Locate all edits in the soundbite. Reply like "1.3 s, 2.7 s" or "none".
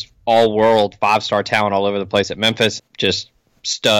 2.8 s